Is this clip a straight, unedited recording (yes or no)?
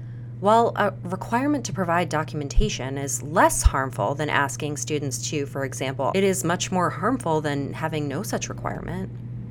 no